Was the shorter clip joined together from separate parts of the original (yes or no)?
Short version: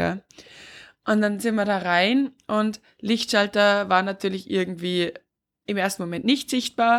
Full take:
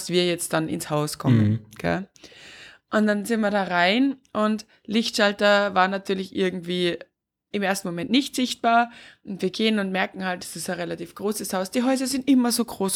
no